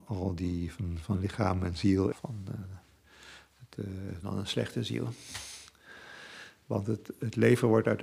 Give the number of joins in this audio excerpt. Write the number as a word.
two